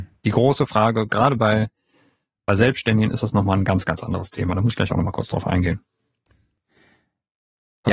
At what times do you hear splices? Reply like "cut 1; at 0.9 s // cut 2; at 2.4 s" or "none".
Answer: none